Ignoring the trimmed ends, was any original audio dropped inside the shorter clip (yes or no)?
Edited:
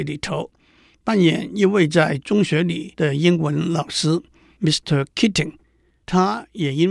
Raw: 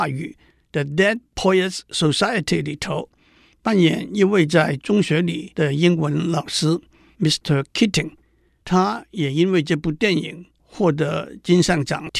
no